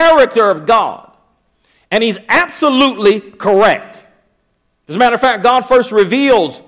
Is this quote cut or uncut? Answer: uncut